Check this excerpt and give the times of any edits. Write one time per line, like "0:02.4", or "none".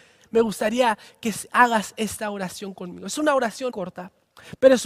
0:03.7